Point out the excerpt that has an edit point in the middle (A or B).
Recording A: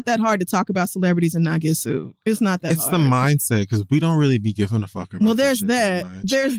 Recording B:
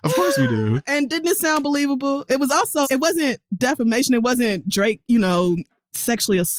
B